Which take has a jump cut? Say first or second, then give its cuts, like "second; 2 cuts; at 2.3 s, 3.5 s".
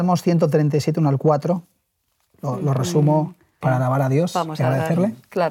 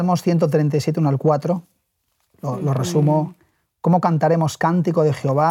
first; 1 cut; at 3.6 s